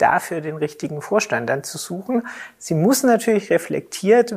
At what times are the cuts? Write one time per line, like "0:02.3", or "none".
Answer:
0:02.6